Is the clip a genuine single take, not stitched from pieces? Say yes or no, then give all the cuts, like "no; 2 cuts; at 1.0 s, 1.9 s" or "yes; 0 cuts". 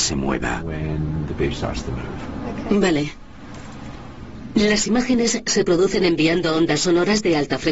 yes; 0 cuts